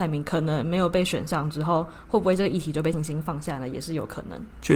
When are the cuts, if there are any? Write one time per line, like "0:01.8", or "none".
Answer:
0:02.9